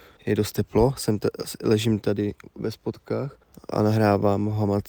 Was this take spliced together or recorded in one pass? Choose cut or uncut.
uncut